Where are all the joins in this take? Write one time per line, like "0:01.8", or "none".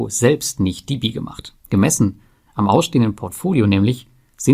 0:01.6